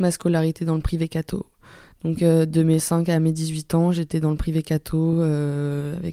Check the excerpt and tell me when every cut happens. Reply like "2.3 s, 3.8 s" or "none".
none